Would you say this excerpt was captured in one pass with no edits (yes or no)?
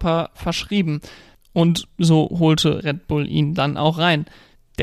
yes